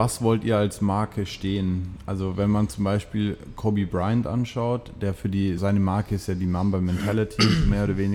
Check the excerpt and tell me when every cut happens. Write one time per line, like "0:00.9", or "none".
0:05.6